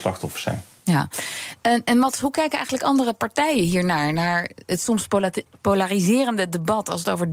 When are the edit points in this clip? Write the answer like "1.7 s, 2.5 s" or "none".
none